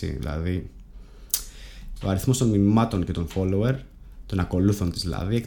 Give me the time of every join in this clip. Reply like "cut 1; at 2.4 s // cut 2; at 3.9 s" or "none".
cut 1; at 2.0 s

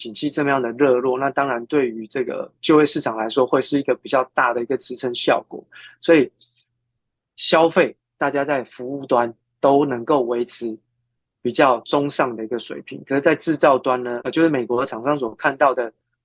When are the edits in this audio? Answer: cut 1; at 14.2 s

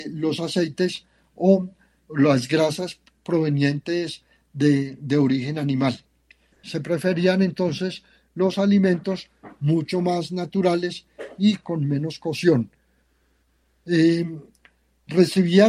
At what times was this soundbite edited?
cut 1; at 6.5 s

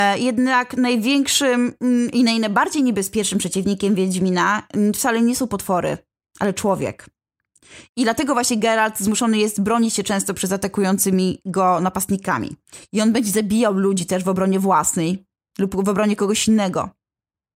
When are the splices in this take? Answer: none

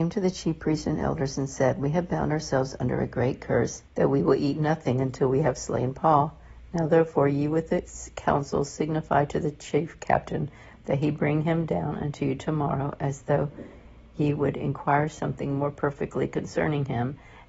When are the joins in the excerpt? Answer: cut 1; at 3.9 s

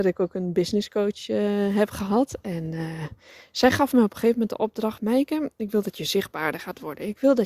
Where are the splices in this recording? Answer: none

